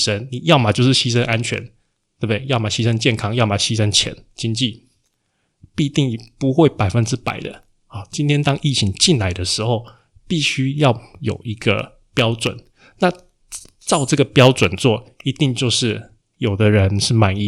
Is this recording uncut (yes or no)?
yes